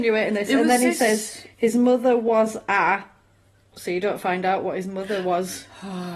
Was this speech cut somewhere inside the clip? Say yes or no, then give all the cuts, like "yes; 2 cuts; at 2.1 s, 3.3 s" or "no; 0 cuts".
yes; 1 cut; at 3.7 s